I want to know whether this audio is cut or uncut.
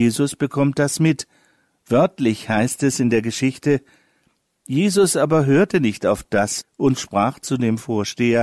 cut